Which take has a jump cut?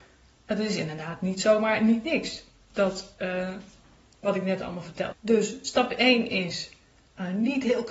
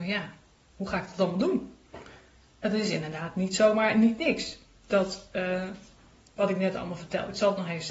first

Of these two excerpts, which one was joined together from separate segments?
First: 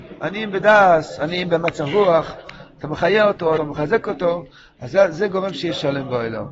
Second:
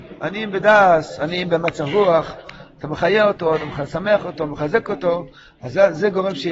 first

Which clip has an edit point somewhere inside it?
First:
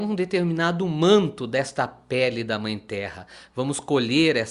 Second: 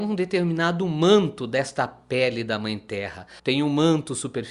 second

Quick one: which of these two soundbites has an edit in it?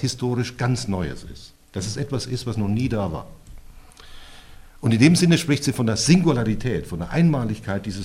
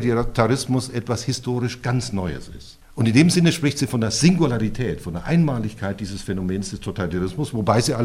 second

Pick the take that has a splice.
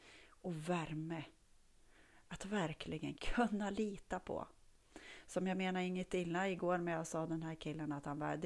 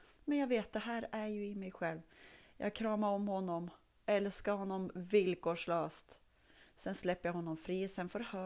first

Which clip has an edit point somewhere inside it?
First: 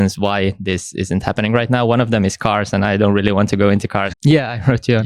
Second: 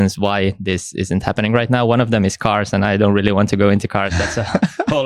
first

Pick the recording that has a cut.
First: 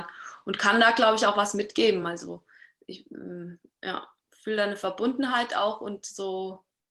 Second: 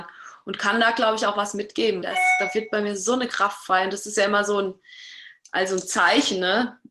second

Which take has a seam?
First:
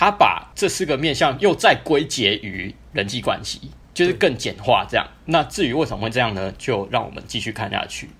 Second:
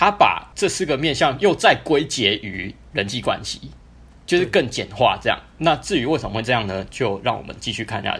first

